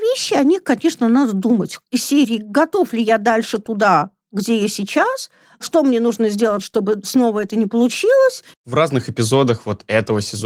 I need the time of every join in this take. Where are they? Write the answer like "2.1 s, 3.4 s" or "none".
8.5 s